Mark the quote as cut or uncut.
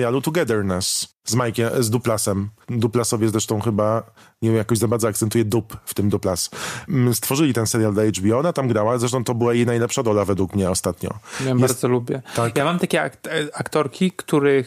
uncut